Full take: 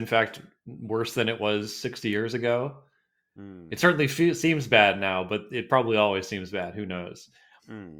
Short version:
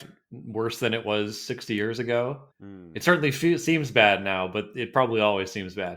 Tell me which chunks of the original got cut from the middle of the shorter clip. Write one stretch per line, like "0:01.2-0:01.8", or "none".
0:02.9-0:03.3